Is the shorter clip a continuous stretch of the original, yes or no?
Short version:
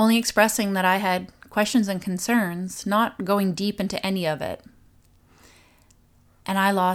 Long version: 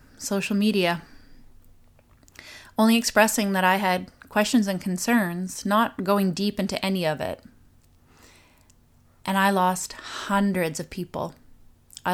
yes